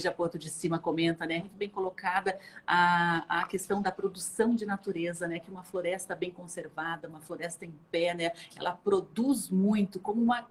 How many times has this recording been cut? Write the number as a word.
one